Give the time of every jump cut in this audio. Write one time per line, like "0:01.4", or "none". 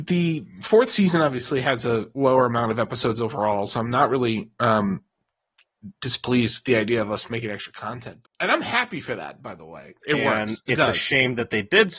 0:02.1
0:08.2
0:10.0